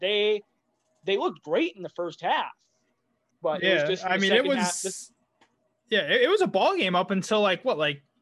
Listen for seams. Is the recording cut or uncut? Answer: cut